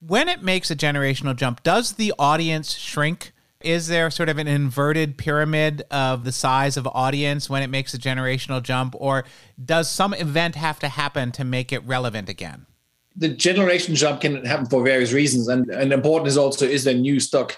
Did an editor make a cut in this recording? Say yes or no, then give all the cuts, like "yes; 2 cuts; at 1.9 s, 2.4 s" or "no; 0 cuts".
yes; 1 cut; at 15.6 s